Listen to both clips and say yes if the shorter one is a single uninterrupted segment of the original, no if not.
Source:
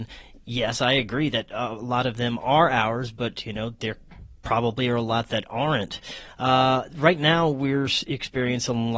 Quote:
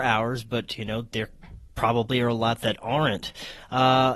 yes